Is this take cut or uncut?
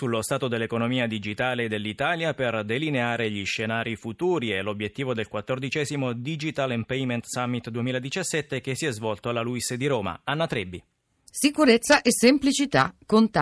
uncut